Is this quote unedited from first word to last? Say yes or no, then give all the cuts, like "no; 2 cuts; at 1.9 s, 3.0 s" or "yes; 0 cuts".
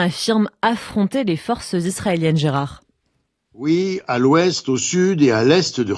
yes; 0 cuts